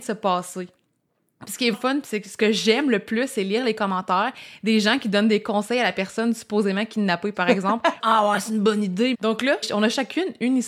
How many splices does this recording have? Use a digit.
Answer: 3